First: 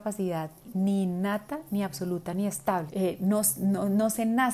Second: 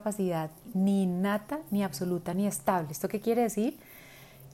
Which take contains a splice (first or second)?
first